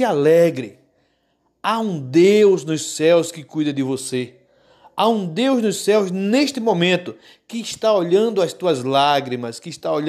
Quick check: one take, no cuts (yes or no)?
yes